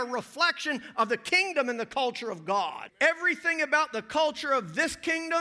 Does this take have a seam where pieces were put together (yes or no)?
yes